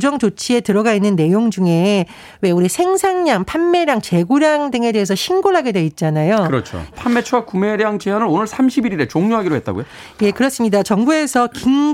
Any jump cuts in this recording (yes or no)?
yes